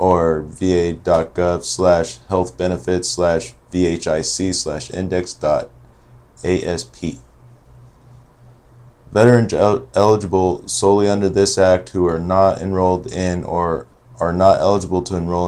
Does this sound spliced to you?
no; 0 cuts

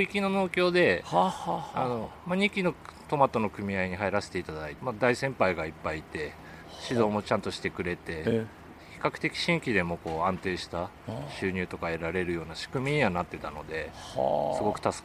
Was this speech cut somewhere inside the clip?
yes; 1 cut; at 4.8 s

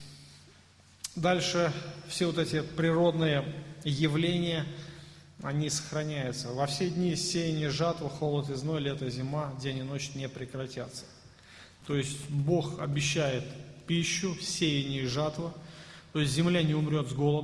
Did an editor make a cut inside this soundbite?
yes; 1 cut; at 11.8 s

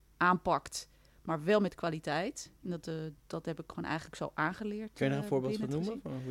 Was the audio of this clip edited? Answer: no; 0 cuts

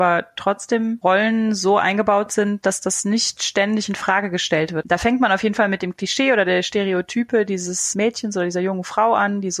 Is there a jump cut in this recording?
yes; 1 cut; at 4.8 s

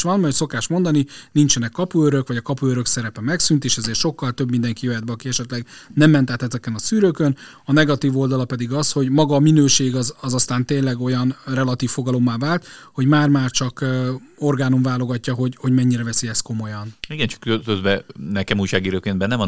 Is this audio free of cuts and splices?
yes; 0 cuts

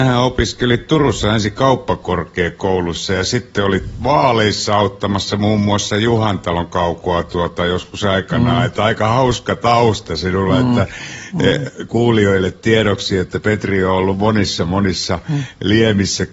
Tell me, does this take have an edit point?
no; 0 cuts

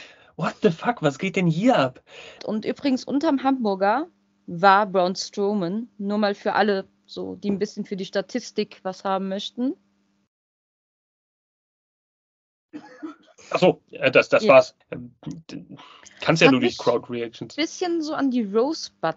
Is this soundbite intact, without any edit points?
no; 2 cuts; at 2.4 s, 14.8 s

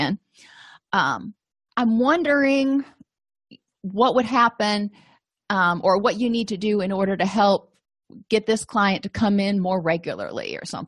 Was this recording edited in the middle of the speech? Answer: yes; 1 cut; at 1.7 s

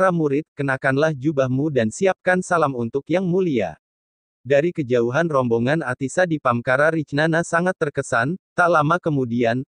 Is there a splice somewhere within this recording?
no; 0 cuts

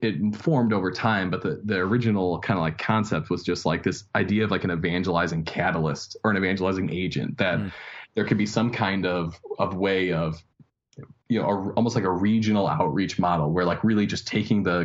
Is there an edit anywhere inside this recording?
no; 0 cuts

